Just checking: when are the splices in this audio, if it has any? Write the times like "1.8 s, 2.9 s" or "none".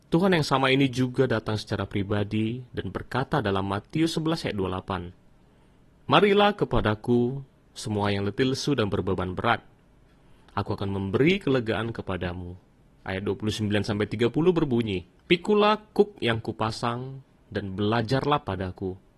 13.0 s, 15.2 s